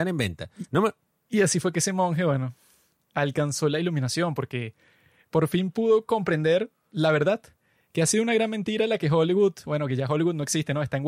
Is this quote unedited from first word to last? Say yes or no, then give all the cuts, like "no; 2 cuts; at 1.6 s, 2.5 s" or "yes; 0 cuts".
yes; 0 cuts